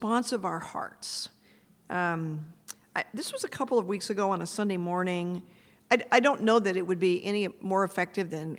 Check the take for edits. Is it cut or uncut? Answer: cut